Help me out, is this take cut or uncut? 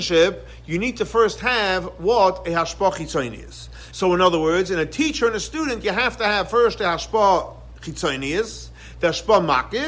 cut